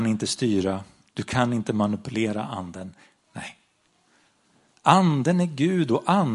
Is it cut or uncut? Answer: cut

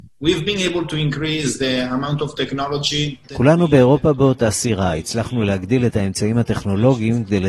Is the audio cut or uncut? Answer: cut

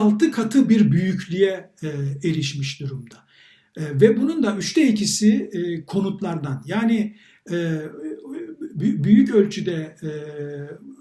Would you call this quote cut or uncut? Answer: uncut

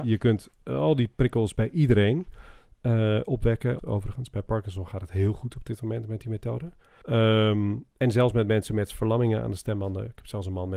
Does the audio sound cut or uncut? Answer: cut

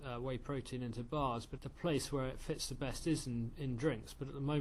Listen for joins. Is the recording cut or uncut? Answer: cut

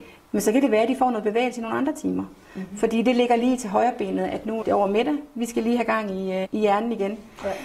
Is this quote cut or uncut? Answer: cut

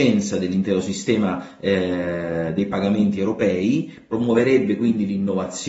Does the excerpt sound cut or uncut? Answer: uncut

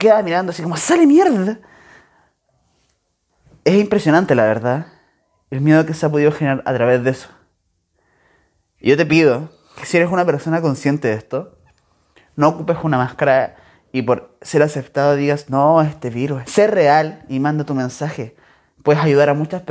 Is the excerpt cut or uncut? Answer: cut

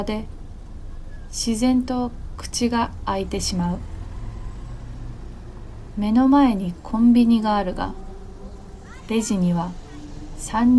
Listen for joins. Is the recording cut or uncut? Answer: uncut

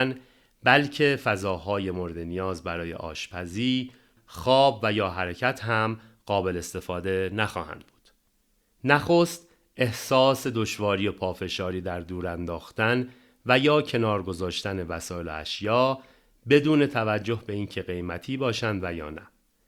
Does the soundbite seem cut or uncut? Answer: cut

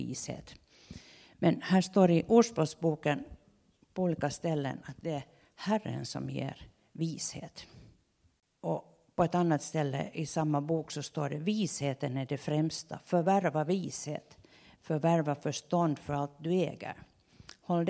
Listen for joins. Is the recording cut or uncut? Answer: uncut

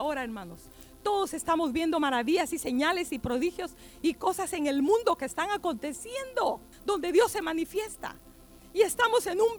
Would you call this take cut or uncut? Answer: cut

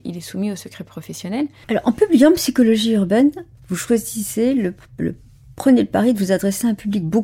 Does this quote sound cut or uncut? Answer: cut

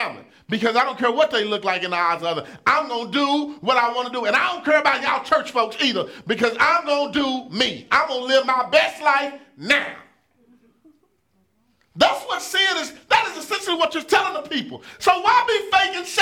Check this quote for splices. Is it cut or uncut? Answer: uncut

